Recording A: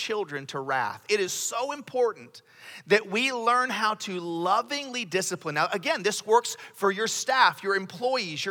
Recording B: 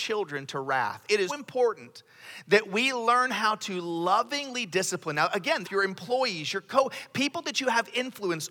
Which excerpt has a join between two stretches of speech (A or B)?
B